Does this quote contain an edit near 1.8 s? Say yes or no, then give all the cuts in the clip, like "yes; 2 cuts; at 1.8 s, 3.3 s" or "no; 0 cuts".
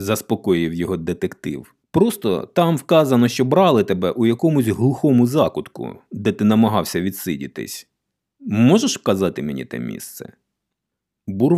yes; 1 cut; at 1.8 s